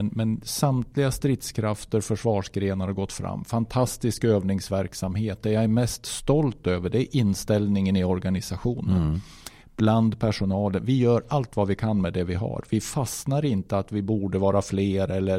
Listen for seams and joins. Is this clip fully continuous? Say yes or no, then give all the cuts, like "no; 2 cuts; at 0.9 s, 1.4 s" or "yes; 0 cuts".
yes; 0 cuts